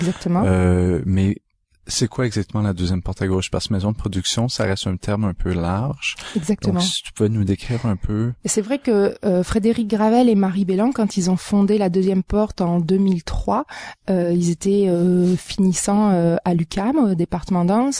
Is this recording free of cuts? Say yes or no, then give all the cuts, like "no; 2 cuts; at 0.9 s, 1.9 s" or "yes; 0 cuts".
yes; 0 cuts